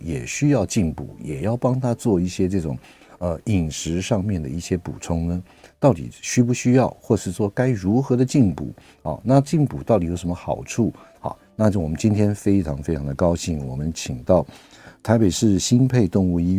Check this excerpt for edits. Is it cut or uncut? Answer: cut